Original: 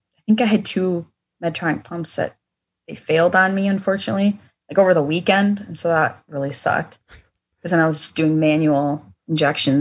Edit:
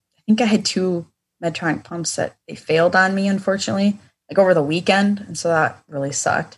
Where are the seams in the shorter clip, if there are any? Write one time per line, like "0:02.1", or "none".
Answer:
0:02.4

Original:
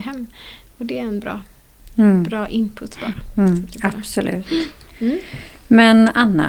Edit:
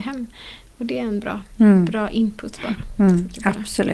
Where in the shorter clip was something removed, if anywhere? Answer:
0:01.5

